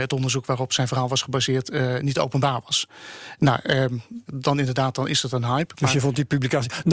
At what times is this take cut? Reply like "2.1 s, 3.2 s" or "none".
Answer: 4.3 s